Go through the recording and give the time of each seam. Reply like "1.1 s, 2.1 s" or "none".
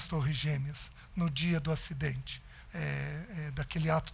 2.7 s